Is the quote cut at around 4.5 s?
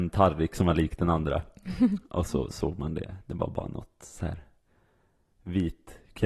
no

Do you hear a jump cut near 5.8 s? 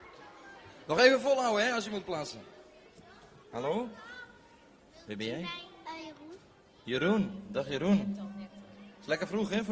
no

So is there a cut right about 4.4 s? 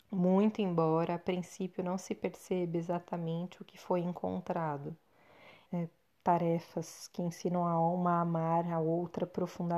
no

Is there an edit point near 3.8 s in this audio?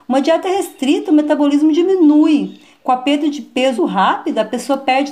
yes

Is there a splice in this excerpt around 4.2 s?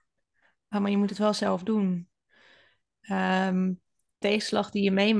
yes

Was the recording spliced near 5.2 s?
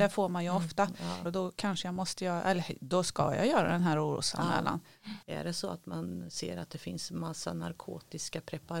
yes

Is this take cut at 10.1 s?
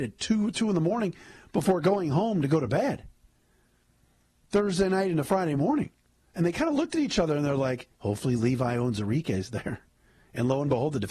no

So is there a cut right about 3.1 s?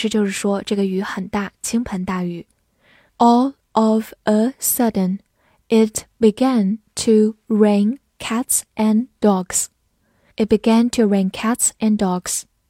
yes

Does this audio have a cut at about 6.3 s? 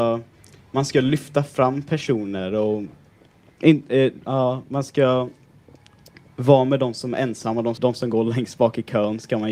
no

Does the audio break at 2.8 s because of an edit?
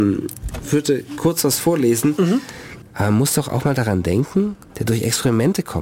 yes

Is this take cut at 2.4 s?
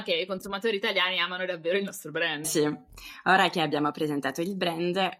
yes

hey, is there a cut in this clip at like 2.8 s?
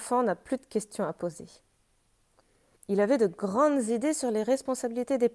yes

